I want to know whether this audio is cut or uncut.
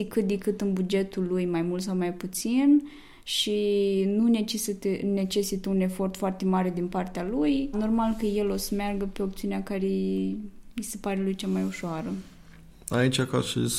cut